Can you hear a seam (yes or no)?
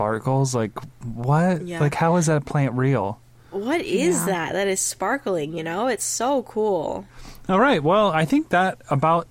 no